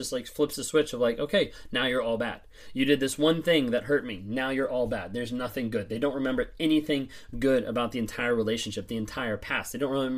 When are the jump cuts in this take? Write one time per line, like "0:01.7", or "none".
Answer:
none